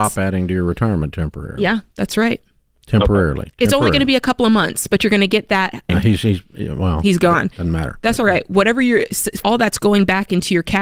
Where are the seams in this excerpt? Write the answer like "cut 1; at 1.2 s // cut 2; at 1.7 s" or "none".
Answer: cut 1; at 5.9 s // cut 2; at 9.4 s